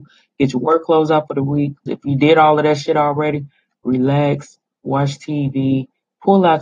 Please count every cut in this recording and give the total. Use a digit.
1